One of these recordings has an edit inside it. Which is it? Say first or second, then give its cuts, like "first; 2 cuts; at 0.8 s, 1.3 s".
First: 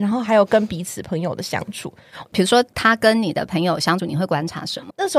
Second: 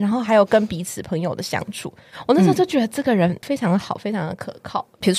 first; 2 cuts; at 2.2 s, 4.0 s